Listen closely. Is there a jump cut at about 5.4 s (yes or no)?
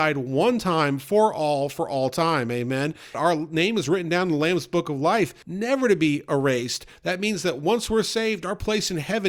yes